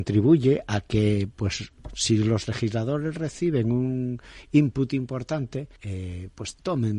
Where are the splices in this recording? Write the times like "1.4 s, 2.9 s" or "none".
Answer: 5.8 s